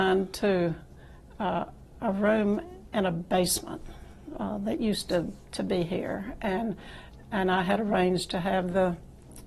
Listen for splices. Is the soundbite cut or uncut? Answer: uncut